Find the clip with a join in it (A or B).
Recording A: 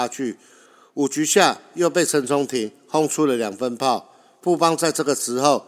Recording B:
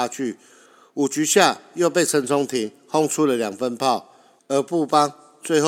B